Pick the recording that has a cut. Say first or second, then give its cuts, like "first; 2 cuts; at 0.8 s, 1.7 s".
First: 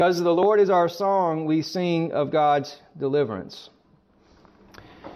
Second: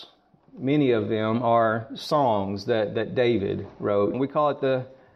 second; 1 cut; at 4.1 s